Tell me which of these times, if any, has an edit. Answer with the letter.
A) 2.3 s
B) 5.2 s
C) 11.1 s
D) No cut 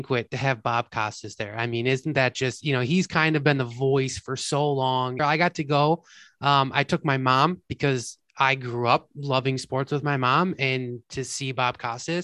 B